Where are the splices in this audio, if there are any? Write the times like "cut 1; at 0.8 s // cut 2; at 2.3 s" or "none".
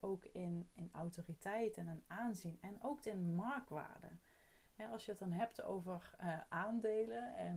none